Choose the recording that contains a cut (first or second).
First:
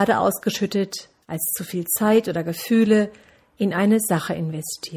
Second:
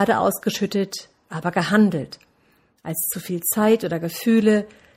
first